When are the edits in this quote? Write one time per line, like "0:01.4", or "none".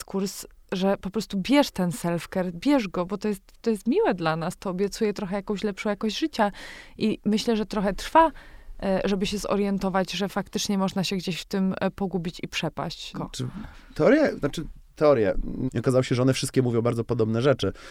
0:13.1
0:15.7